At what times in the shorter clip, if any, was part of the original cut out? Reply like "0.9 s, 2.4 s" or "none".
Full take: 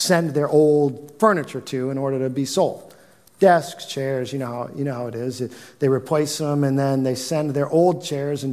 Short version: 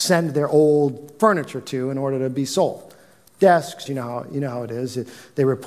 3.9 s